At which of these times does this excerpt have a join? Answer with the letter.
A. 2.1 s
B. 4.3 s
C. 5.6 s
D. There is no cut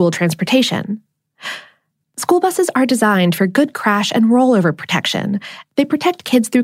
D